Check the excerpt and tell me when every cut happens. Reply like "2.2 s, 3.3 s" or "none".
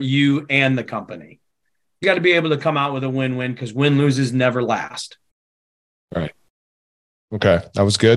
2.0 s

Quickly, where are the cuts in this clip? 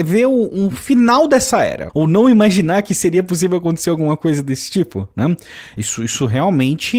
1.9 s, 5.8 s

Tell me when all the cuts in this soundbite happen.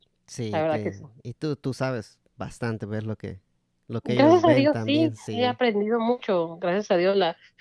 none

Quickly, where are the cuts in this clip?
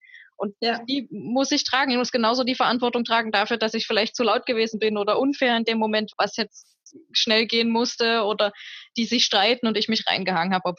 6.1 s

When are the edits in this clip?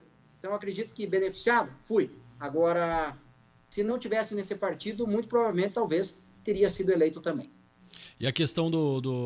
none

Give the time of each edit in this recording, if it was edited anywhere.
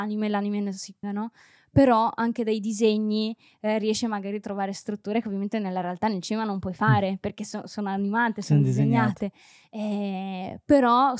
1.0 s

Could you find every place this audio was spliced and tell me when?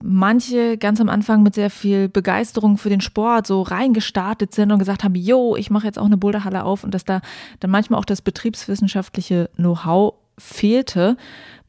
none

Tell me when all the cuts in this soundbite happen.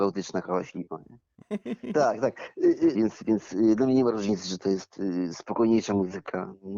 1.4 s, 2.9 s

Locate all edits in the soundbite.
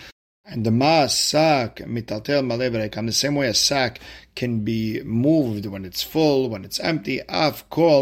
none

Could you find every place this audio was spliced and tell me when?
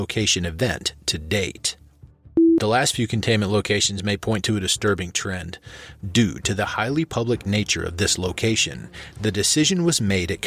6.0 s

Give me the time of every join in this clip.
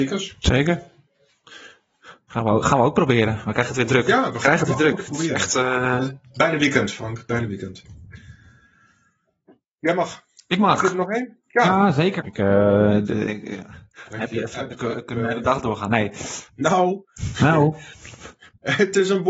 12.2 s, 16.5 s

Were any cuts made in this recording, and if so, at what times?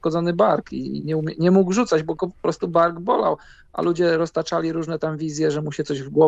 1.0 s

